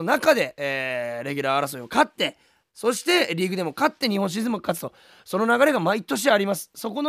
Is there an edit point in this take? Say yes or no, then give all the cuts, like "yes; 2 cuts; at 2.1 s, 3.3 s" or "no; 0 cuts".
no; 0 cuts